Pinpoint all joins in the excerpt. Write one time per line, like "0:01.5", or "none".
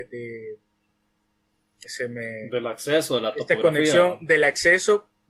0:01.8